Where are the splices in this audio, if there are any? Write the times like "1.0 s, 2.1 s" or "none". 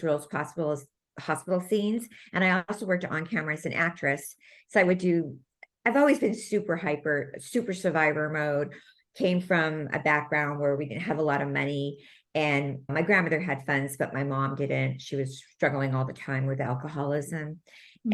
12.9 s